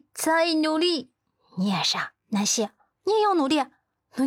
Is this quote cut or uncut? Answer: uncut